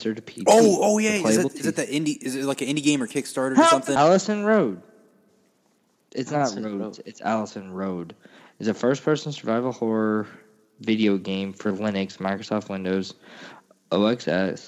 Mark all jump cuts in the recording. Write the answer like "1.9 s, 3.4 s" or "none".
4.0 s